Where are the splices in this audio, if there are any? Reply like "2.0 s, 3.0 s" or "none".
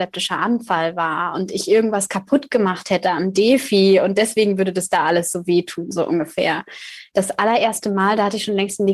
7.1 s

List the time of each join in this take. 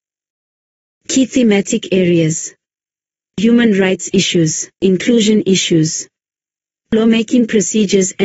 4.7 s

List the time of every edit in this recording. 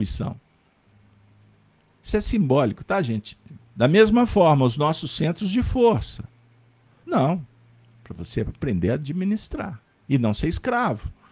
3.6 s, 7.0 s

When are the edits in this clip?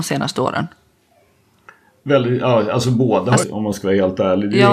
3.4 s

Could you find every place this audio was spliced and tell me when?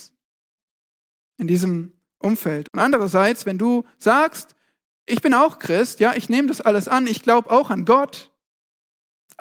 2.6 s

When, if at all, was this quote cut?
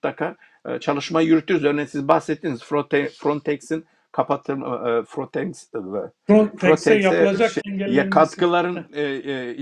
5.1 s, 7.6 s

